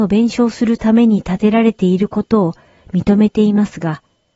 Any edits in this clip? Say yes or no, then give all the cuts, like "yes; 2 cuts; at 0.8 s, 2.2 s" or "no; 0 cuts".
no; 0 cuts